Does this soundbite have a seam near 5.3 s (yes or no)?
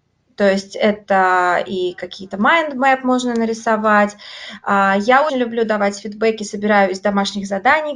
yes